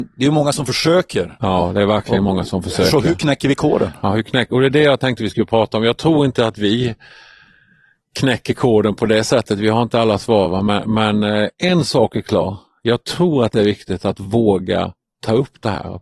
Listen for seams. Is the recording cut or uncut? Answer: uncut